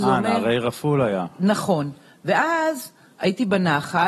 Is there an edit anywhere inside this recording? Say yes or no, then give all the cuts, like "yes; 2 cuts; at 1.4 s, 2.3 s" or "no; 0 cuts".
no; 0 cuts